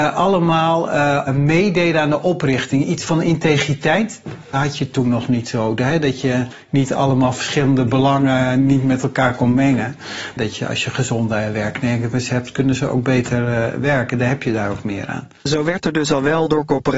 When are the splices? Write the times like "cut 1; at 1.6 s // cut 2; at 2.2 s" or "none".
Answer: cut 1; at 10.4 s

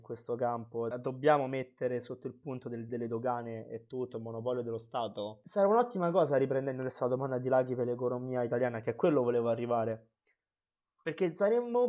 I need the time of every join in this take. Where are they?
cut 1; at 2.9 s

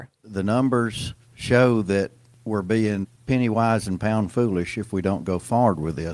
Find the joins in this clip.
cut 1; at 1.2 s

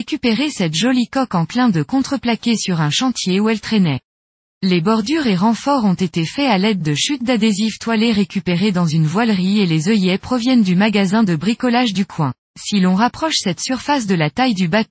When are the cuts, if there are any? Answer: cut 1; at 4.4 s // cut 2; at 12.5 s

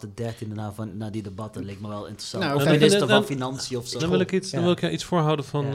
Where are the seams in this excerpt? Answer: cut 1; at 4.0 s

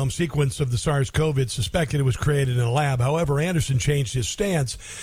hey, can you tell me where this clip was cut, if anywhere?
none

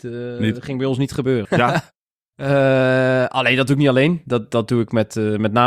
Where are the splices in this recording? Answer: cut 1; at 1.5 s

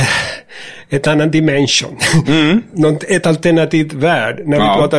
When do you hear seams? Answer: none

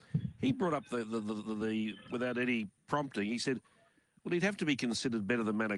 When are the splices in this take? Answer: cut 1; at 2.1 s

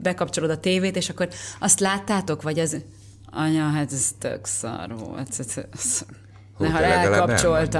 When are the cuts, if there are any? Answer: none

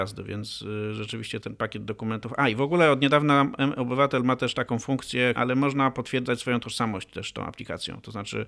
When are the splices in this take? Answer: cut 1; at 1.4 s // cut 2; at 5.4 s

